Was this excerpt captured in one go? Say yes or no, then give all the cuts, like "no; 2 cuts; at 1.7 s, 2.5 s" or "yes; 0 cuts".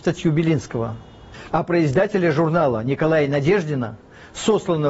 no; 1 cut; at 1.5 s